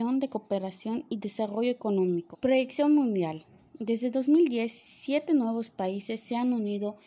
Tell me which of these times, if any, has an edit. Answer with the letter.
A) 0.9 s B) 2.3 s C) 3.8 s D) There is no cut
B